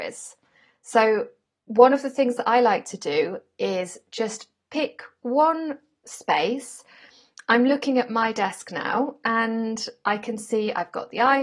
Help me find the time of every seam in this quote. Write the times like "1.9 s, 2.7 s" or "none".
none